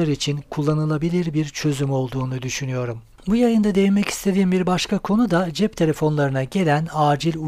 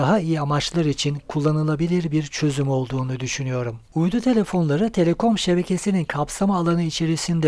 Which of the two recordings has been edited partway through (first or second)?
second